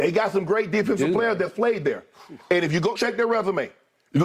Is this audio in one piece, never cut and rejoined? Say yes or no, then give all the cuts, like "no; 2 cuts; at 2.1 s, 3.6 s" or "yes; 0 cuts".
no; 1 cut; at 3.0 s